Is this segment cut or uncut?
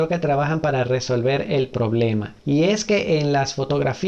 uncut